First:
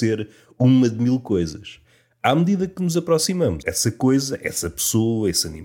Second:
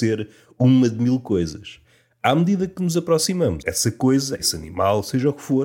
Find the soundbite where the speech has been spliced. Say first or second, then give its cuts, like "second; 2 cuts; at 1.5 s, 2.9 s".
second; 1 cut; at 4.4 s